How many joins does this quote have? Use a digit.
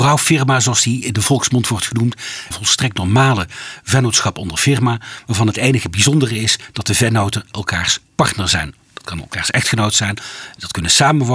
1